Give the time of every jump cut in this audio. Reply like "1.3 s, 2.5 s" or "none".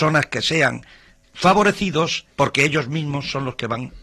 1.2 s, 2.3 s